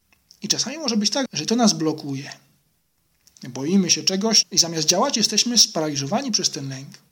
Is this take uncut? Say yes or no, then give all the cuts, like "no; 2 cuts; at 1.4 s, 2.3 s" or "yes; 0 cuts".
no; 2 cuts; at 1.3 s, 4.4 s